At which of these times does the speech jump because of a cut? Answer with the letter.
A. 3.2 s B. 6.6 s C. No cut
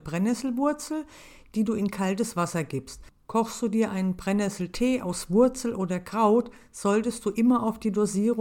A